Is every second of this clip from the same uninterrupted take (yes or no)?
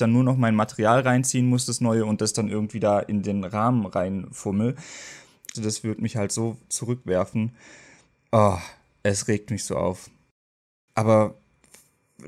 no